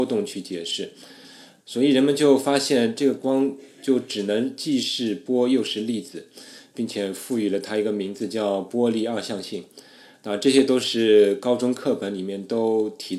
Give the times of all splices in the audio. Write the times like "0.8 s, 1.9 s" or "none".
1.6 s